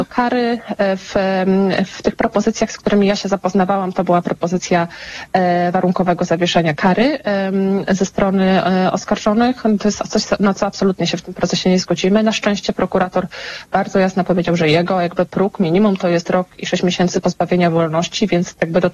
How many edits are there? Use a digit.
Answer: 0